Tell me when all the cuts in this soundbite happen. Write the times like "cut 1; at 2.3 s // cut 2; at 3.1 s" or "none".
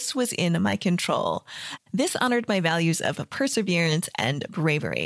cut 1; at 1.8 s